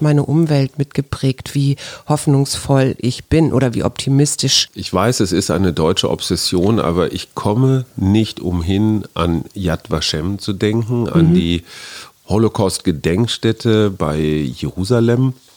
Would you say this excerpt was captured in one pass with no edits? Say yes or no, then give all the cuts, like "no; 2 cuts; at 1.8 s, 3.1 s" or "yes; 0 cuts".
yes; 0 cuts